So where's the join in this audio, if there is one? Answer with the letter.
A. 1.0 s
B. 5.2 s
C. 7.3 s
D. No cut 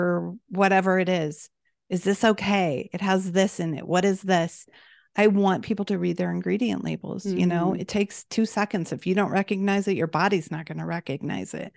D